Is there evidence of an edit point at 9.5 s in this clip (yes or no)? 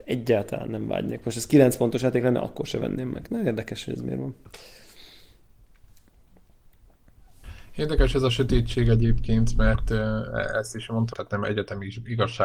no